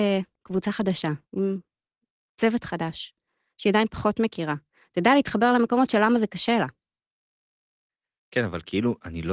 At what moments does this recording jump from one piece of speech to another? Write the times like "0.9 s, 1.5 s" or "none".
1.3 s

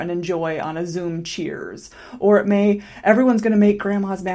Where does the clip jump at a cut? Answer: none

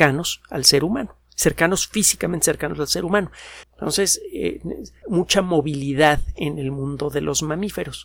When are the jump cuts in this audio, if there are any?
3.6 s, 5.0 s

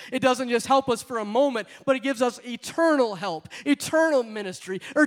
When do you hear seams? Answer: none

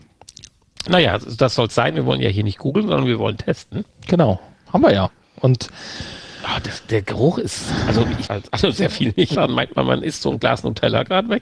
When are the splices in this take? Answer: 8.3 s, 9.4 s

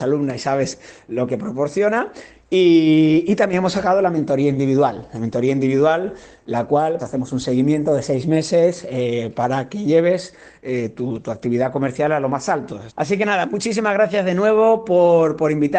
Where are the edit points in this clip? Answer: 7.0 s, 12.9 s

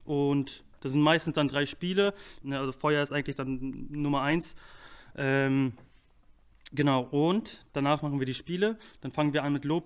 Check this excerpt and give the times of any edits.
2.4 s

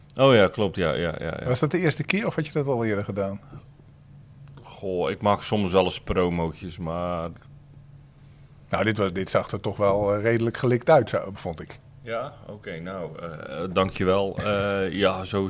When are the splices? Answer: none

